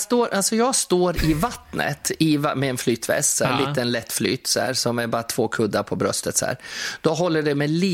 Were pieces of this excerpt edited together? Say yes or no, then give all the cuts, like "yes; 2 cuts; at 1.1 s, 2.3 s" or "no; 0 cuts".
no; 0 cuts